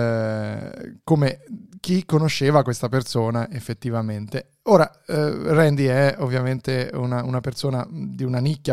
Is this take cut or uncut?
uncut